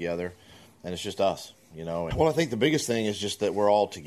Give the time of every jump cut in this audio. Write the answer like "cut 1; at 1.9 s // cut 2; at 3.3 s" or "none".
cut 1; at 2.1 s